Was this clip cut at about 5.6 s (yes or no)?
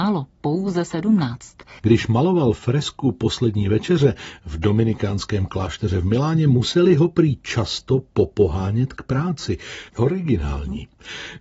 no